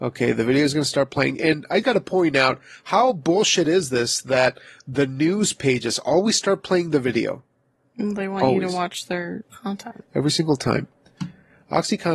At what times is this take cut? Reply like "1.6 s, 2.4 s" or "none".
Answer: 1.8 s